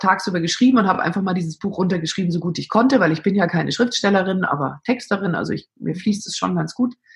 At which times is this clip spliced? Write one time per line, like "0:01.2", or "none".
none

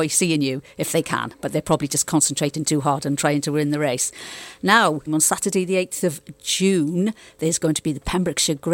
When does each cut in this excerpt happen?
0:05.1

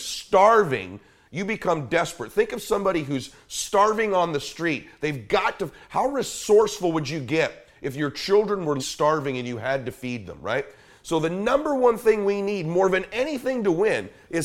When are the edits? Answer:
0:08.8

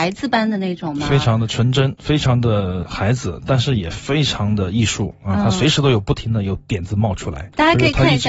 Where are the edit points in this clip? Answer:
none

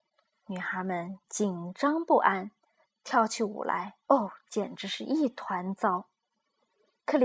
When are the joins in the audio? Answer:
0:02.9
0:04.0

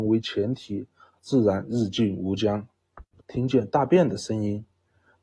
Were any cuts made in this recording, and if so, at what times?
0:01.2
0:03.2

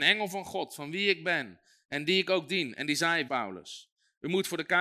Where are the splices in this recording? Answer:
0:03.3

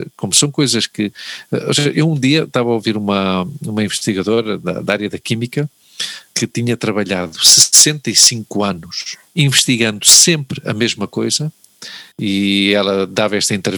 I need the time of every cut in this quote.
0:09.3
0:12.1

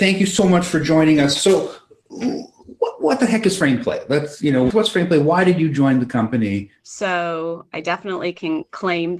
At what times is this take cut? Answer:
0:04.7
0:06.8

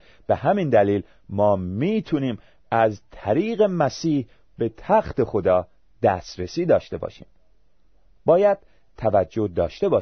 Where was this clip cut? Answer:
none

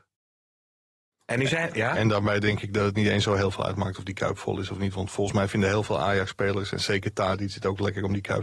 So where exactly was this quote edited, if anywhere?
0:01.1

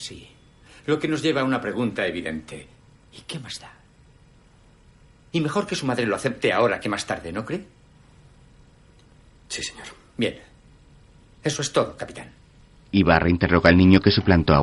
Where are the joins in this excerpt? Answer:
0:05.3

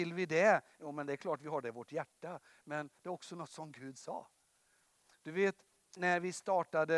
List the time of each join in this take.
0:06.0

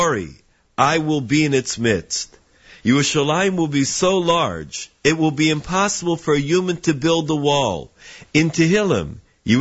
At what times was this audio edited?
0:08.3

